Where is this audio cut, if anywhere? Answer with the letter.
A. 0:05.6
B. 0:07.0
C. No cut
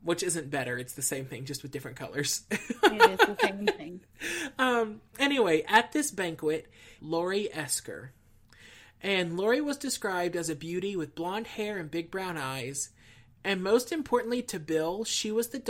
B